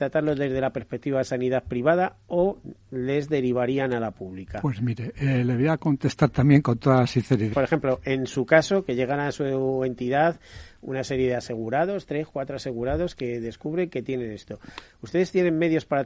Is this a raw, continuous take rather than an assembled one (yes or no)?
no